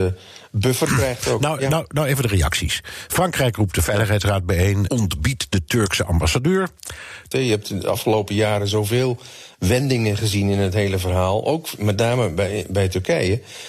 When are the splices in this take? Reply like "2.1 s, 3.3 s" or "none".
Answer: 4.9 s, 7.3 s